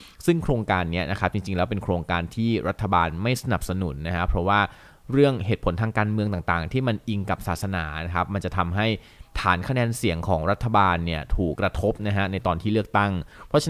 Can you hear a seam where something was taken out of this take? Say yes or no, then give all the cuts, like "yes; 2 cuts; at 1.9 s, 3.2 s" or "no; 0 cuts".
yes; 1 cut; at 11.6 s